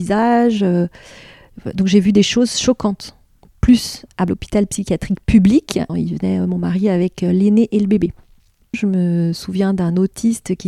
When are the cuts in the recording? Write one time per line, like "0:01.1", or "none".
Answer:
0:05.9
0:08.7